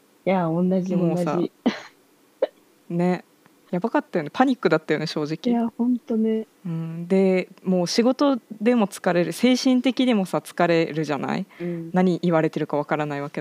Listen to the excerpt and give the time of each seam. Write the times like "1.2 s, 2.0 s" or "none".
none